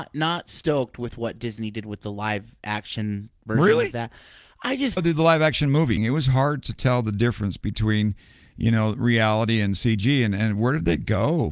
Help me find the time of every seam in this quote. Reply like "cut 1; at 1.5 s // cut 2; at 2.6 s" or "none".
cut 1; at 5.0 s // cut 2; at 6.0 s